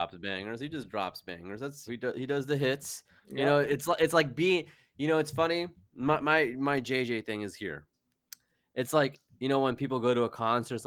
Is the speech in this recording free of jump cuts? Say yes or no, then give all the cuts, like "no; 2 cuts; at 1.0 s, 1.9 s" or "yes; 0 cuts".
no; 1 cut; at 1.9 s